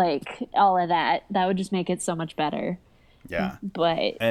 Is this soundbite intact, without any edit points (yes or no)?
yes